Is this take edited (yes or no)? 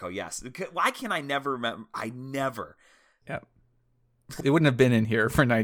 yes